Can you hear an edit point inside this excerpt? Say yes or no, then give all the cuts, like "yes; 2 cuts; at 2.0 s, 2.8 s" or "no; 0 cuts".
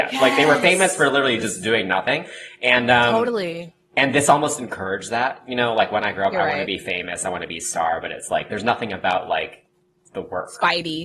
no; 0 cuts